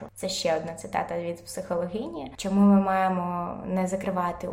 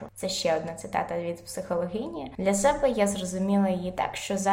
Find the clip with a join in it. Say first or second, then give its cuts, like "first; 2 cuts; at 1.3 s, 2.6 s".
first; 1 cut; at 2.4 s